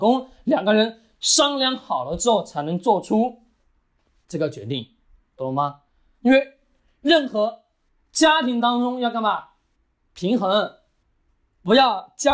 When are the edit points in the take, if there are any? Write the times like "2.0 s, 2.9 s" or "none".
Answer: none